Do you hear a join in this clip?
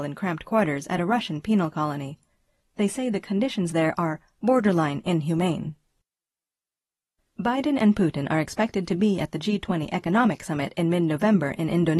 yes; 1 cut; at 7.2 s

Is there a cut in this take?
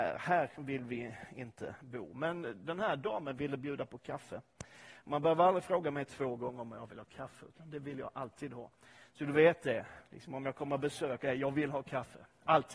no; 0 cuts

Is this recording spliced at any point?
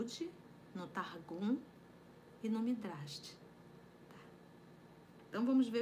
no; 0 cuts

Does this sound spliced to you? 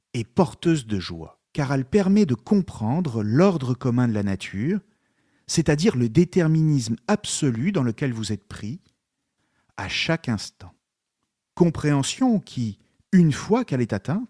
yes; 2 cuts; at 1.5 s, 11.5 s

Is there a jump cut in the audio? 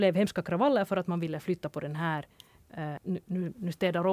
yes; 1 cut; at 3.0 s

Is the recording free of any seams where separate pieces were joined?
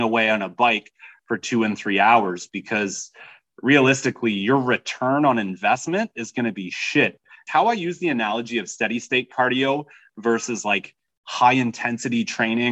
no; 1 cut; at 7.5 s

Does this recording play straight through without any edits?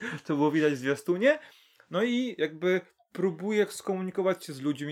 yes; 0 cuts

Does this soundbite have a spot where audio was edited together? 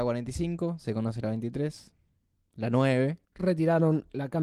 yes; 1 cut; at 3.2 s

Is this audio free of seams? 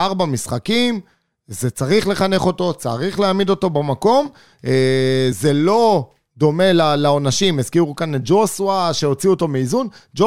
yes; 0 cuts

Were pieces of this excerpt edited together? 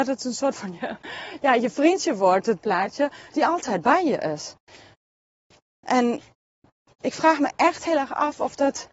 no; 0 cuts

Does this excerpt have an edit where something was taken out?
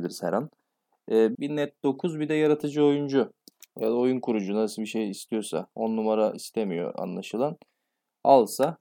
yes; 1 cut; at 1.3 s

